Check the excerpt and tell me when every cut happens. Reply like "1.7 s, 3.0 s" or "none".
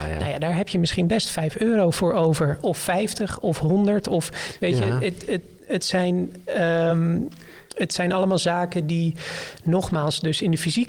none